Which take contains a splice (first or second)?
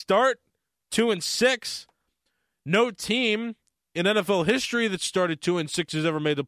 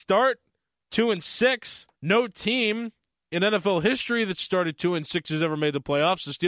second